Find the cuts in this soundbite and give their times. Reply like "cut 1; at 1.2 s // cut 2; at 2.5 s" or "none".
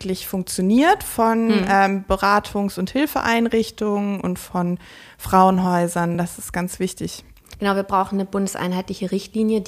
none